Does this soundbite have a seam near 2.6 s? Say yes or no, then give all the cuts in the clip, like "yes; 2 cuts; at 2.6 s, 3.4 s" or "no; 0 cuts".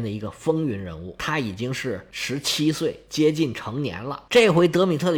no; 2 cuts; at 1.2 s, 4.3 s